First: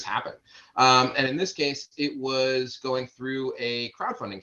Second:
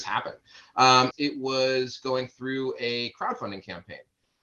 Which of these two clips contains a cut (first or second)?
second